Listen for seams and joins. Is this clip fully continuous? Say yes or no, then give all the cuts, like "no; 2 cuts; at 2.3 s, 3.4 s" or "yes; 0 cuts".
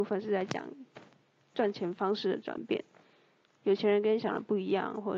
no; 1 cut; at 3.6 s